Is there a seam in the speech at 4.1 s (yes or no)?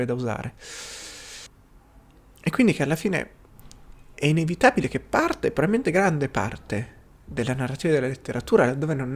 yes